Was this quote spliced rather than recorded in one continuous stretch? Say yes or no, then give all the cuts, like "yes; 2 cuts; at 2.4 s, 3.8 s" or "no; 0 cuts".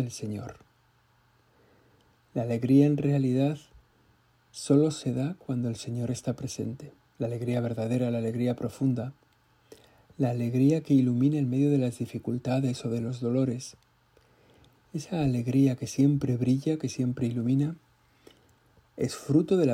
no; 0 cuts